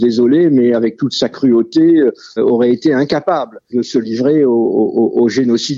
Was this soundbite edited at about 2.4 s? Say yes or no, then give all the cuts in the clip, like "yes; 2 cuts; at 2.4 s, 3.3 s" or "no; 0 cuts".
yes; 2 cuts; at 2.4 s, 3.7 s